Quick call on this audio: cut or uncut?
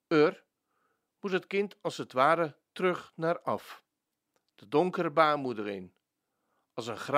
uncut